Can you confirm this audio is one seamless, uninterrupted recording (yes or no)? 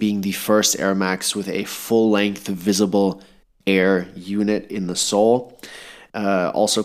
yes